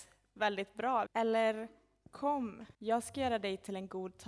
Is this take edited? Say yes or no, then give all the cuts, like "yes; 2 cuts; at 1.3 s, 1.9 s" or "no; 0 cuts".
yes; 2 cuts; at 1.1 s, 2.7 s